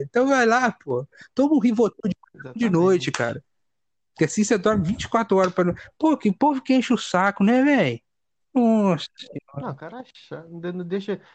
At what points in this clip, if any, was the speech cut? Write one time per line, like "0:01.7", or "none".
none